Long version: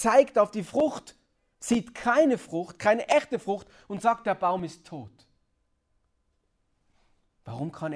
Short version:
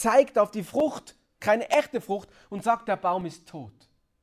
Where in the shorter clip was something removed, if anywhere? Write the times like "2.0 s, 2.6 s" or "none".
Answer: 1.4 s